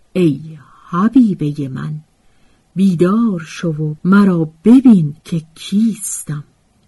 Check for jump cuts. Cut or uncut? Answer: cut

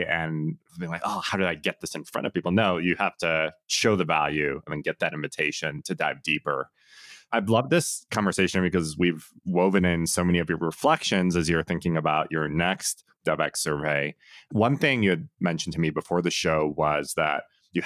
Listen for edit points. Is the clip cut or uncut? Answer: uncut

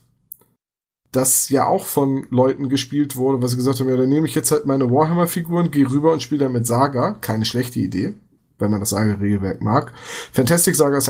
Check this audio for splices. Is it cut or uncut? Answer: uncut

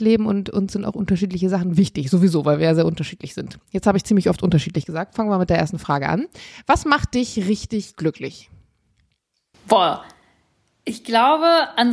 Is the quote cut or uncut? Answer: uncut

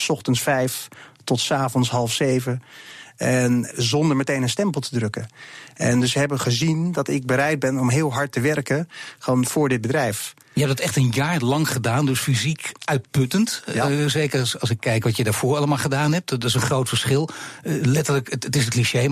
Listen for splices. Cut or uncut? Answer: cut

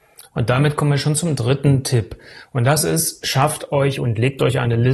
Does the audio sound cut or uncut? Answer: uncut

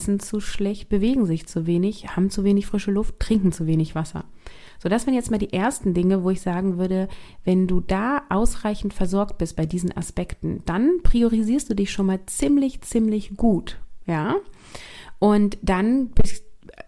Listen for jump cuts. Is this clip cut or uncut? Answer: uncut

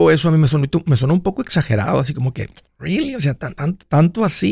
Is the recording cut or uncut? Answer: uncut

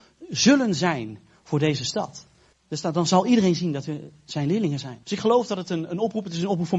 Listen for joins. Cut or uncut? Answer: cut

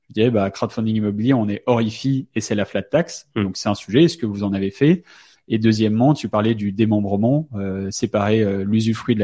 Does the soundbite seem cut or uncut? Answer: uncut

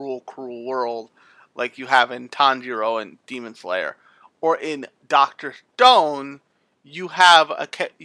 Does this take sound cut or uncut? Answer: uncut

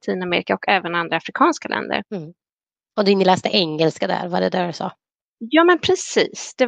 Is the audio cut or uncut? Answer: cut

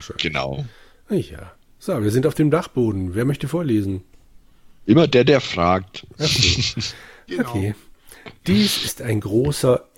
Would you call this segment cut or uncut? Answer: uncut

